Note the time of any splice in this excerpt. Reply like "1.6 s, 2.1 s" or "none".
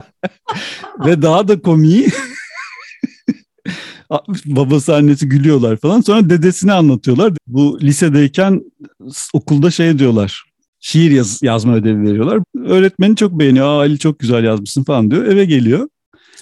7.3 s, 10.7 s, 12.4 s